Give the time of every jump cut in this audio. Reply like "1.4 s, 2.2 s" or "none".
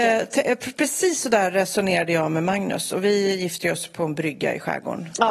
none